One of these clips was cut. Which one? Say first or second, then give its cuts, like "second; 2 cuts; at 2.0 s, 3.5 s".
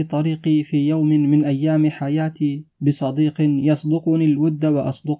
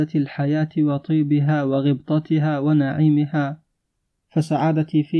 first; 1 cut; at 2.7 s